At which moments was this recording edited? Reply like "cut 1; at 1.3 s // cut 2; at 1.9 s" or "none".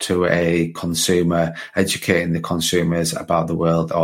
none